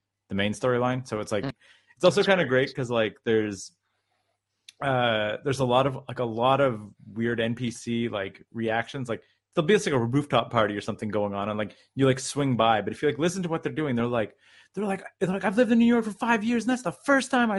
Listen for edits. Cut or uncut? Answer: cut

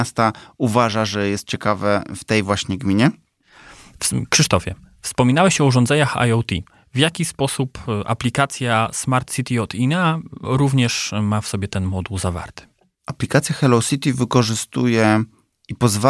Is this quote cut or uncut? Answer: uncut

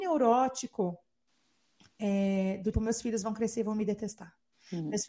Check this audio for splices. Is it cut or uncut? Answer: cut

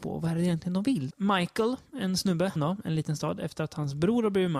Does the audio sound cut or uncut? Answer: cut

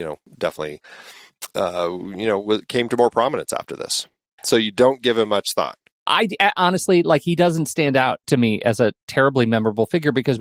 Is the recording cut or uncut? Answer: cut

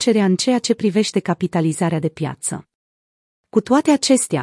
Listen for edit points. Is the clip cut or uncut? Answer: uncut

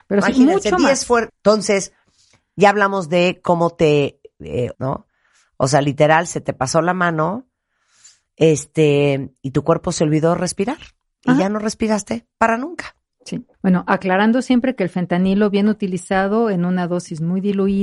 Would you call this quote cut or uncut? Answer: cut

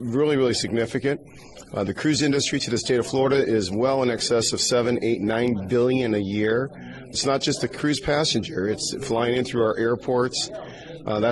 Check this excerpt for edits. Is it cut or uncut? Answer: uncut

